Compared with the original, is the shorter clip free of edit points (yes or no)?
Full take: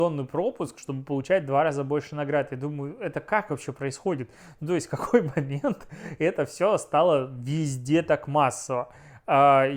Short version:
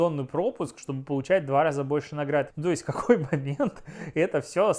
no